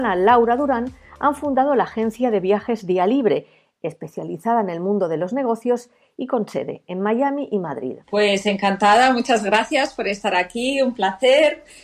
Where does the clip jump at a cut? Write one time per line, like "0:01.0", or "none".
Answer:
0:08.0